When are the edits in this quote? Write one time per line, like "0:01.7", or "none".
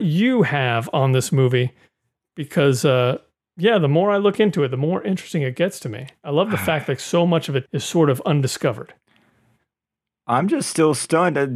0:07.7